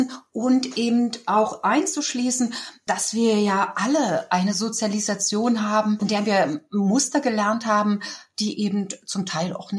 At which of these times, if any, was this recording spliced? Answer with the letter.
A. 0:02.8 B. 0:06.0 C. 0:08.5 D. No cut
D